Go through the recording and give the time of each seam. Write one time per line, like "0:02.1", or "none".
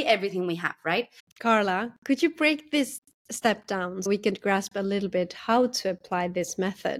0:01.2
0:04.1